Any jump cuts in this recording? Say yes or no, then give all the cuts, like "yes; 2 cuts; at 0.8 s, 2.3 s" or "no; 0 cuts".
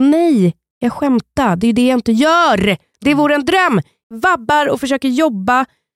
no; 0 cuts